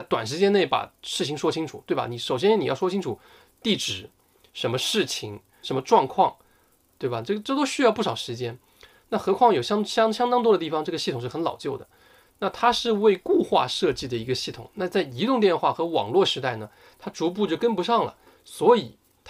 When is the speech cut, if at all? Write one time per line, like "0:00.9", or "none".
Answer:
0:05.6